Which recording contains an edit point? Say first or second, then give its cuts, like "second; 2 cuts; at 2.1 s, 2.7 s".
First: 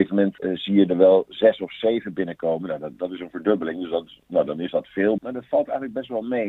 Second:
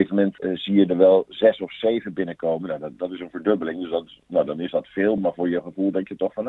first; 1 cut; at 5.2 s